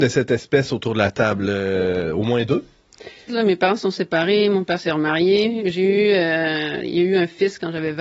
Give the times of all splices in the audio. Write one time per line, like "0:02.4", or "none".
0:03.3